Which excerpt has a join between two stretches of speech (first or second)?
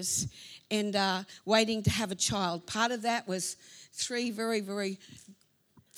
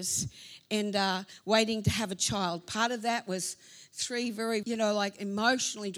second